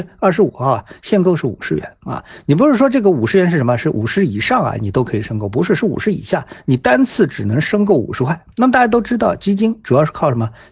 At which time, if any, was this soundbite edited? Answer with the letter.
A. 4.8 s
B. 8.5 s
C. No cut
B